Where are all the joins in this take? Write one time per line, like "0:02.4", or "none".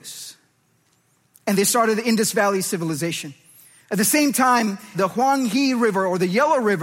0:04.9